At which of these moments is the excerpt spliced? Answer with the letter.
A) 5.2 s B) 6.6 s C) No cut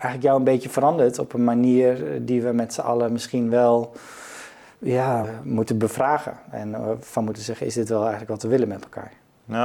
A